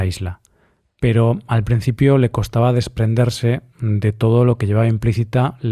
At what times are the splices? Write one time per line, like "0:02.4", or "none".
none